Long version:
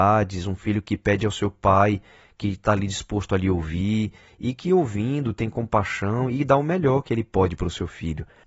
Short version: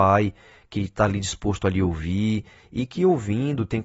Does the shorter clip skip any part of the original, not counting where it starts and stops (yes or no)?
no